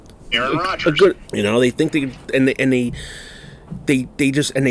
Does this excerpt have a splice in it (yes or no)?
yes